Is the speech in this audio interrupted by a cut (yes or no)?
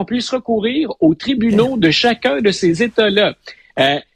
no